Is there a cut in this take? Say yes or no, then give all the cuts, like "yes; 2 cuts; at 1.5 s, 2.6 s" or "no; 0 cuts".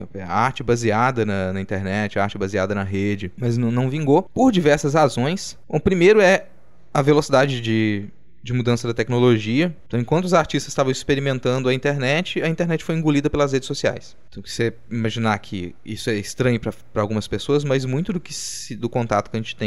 no; 0 cuts